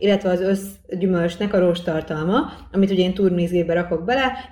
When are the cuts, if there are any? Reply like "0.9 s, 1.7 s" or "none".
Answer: none